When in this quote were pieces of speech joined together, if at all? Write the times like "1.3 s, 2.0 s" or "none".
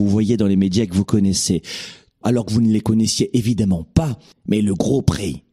2.2 s, 4.3 s